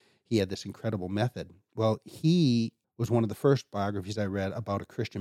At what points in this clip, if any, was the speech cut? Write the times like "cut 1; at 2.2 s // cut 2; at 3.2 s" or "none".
cut 1; at 2.8 s